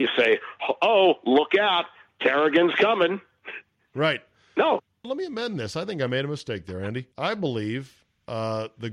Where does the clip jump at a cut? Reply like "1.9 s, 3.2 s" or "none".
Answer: 5.0 s, 7.1 s